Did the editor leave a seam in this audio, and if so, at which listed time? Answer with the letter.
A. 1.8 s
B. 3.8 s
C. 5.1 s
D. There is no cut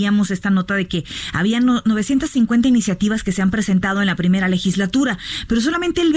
D